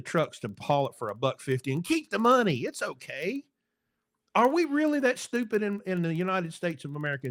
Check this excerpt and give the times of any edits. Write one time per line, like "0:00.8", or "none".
none